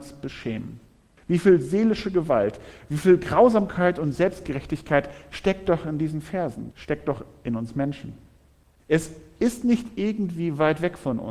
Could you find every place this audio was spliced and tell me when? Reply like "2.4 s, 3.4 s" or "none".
1.2 s, 6.7 s, 8.8 s